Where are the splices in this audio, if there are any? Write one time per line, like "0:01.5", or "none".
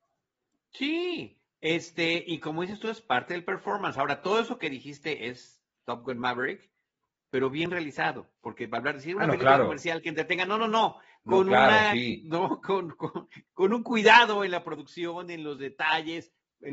0:13.5